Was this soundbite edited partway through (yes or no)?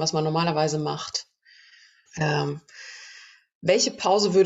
yes